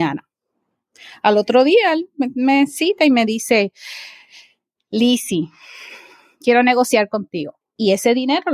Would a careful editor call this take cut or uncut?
cut